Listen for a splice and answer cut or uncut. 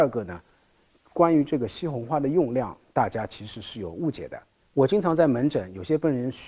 uncut